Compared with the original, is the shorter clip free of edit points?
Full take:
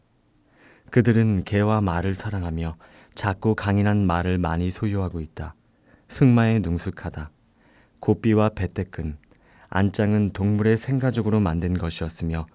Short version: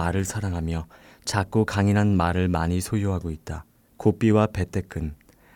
no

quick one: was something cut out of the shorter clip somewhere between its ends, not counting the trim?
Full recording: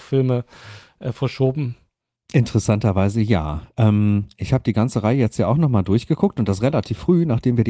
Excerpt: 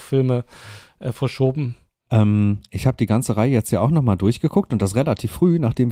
yes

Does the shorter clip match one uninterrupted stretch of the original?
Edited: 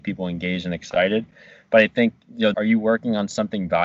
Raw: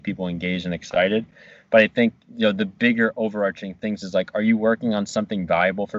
no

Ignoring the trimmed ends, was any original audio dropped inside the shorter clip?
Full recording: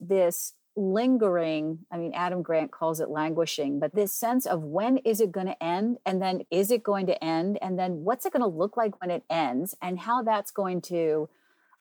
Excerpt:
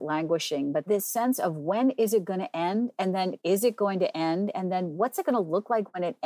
no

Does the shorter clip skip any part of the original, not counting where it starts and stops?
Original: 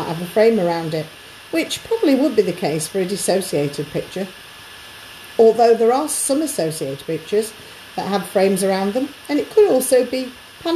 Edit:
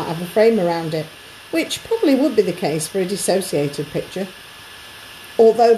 no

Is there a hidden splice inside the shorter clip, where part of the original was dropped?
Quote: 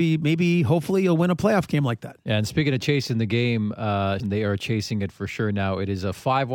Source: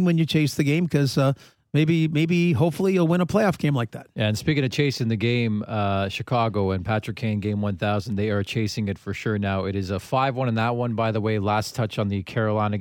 yes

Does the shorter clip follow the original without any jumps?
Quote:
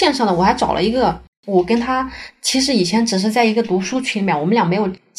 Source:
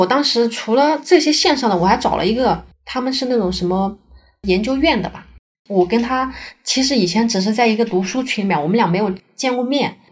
no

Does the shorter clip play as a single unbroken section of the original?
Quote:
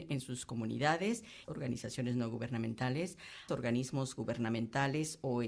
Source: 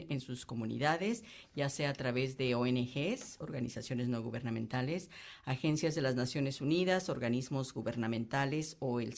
no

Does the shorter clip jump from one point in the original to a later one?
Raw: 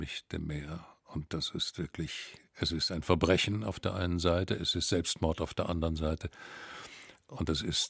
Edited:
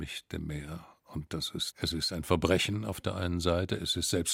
yes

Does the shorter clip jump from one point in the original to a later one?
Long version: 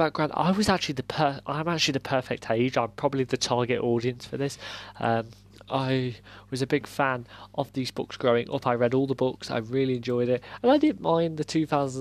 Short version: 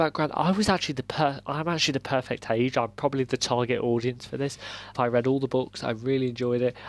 yes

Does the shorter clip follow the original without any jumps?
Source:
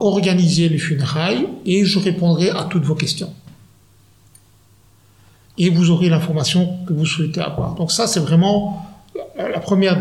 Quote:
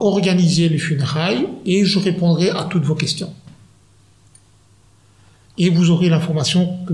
yes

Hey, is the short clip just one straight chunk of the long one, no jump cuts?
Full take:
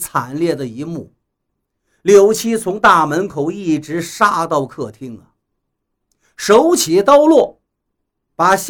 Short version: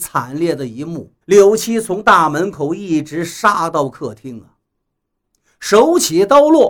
no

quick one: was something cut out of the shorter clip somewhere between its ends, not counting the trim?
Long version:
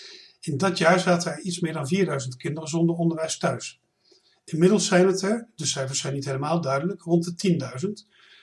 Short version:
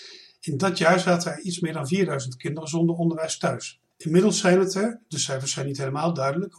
yes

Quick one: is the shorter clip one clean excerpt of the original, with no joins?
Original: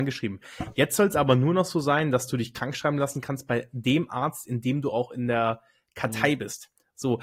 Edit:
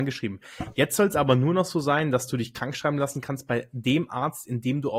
yes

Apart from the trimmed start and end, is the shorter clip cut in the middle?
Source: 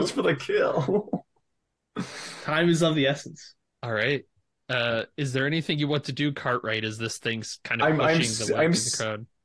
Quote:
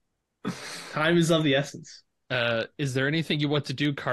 yes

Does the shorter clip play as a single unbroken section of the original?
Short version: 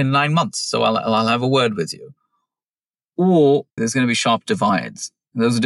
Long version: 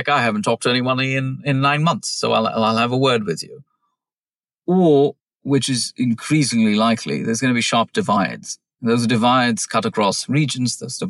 no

